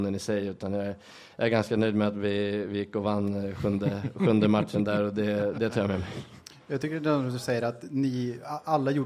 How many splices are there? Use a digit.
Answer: 0